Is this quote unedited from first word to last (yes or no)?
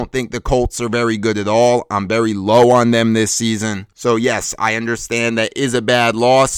yes